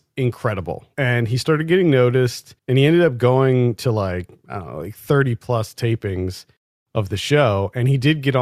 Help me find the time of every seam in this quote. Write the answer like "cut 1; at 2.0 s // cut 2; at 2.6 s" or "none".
cut 1; at 0.9 s // cut 2; at 2.6 s